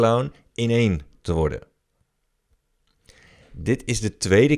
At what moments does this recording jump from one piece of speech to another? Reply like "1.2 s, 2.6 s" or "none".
none